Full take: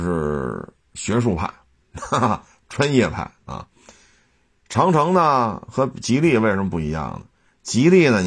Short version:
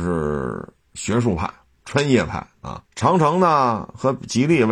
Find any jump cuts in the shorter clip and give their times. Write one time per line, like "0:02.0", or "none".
0:01.8
0:02.9